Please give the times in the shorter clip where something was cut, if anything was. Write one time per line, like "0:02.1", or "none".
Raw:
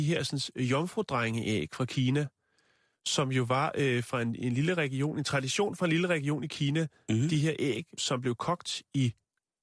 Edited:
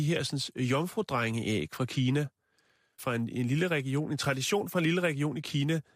0:03.0

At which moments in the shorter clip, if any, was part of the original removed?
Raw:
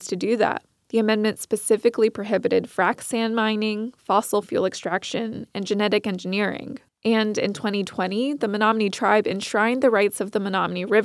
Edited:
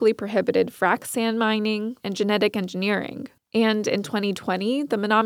0:02.0

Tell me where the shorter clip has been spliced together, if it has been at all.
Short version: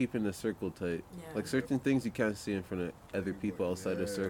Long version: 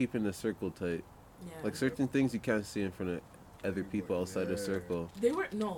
0:01.1
0:03.0

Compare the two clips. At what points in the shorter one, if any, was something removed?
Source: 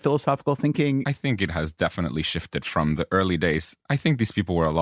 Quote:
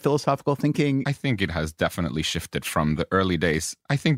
none

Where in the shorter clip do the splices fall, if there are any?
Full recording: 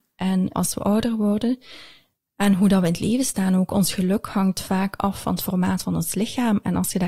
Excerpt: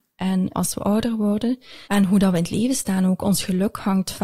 0:01.8

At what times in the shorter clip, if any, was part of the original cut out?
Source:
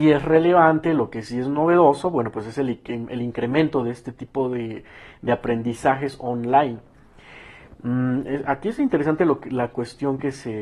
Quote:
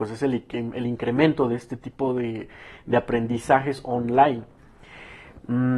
none

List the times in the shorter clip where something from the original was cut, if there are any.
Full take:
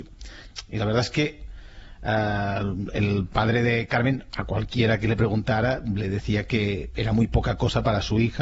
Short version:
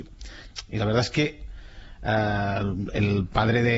none

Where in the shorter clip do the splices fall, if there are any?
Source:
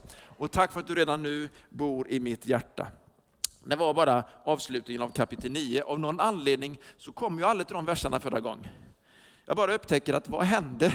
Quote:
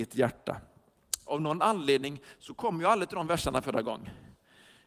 0:01.3

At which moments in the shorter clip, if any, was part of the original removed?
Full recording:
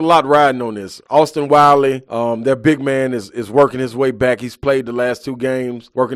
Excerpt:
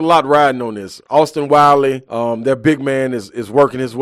none

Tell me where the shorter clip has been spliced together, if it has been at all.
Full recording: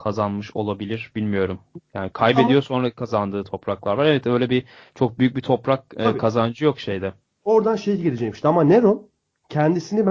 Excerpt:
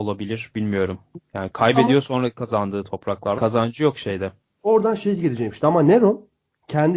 0:03.4

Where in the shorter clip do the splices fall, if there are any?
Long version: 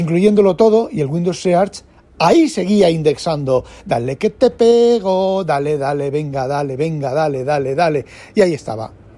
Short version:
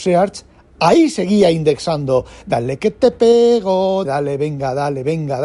0:04.0

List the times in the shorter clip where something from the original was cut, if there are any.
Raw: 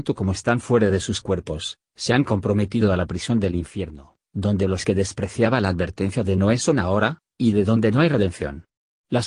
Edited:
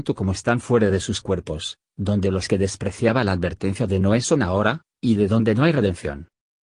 0:01.9

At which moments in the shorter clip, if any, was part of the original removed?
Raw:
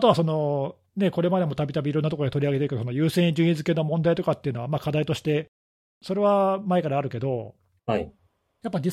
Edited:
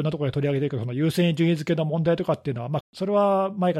0:02.8

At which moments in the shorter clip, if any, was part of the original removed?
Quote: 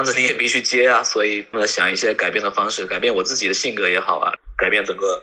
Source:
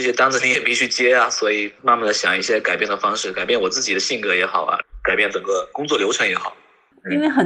0:01.5

